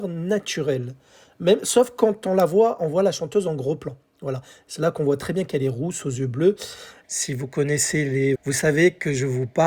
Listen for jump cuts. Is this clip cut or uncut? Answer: cut